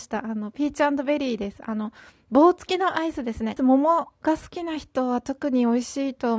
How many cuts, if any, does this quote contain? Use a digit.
1